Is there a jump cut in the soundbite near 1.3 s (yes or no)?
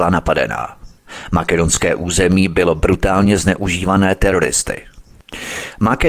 no